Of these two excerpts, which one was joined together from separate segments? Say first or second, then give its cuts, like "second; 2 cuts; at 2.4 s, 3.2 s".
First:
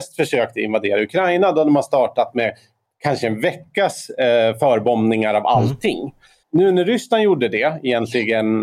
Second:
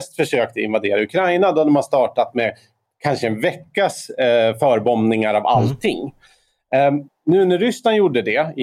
first; 1 cut; at 6.4 s